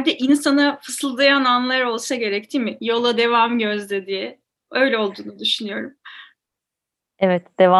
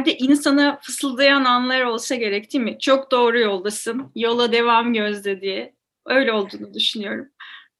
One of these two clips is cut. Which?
first; 1 cut; at 2.8 s

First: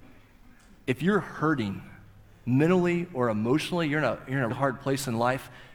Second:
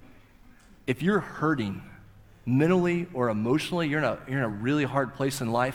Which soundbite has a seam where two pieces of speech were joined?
first; 1 cut; at 4.5 s

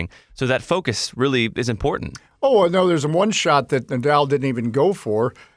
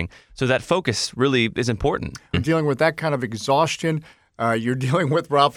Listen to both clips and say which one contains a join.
second; 1 cut; at 2.3 s

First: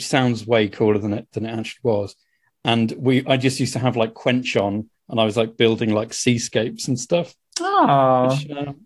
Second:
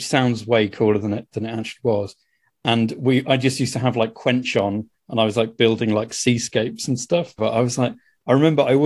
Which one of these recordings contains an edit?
second; 1 cut; at 7.4 s

